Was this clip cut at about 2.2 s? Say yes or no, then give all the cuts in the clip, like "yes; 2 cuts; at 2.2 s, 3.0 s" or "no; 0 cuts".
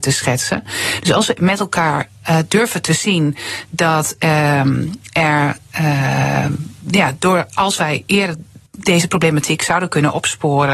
no; 1 cut; at 8.7 s